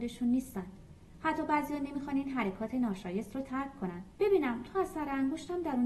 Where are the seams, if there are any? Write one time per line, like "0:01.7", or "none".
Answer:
0:04.1

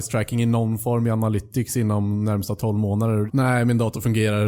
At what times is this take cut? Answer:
0:03.3

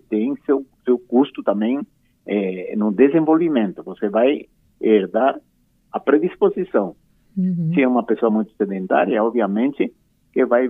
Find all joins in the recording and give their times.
0:07.3

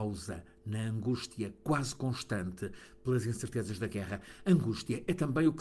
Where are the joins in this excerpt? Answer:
none

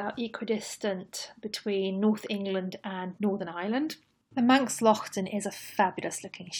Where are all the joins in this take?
none

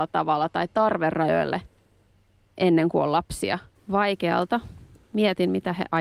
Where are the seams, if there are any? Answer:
0:03.8

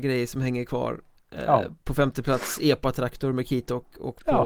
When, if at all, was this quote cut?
none

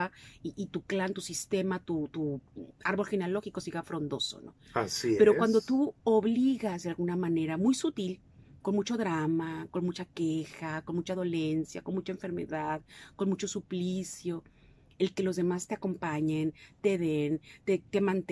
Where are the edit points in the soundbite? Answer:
none

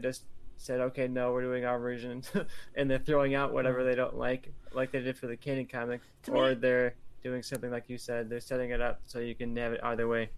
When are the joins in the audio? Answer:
none

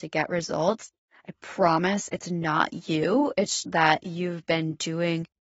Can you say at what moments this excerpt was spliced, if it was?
0:03.6

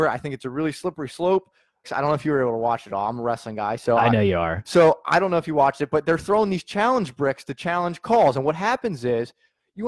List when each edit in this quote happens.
0:01.8

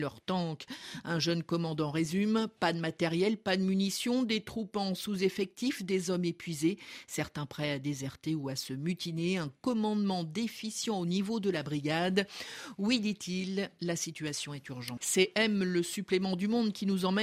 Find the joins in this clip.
0:15.0

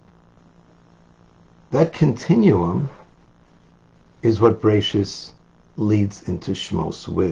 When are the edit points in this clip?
0:01.7

